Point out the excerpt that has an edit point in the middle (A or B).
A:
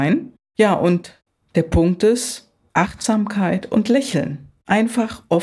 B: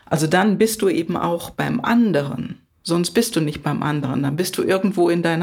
B